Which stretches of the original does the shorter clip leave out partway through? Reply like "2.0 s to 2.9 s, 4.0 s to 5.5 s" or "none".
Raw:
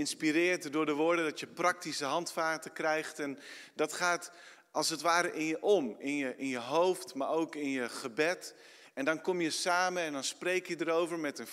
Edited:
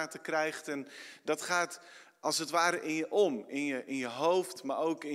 none